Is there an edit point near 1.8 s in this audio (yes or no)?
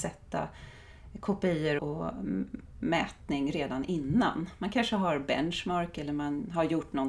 yes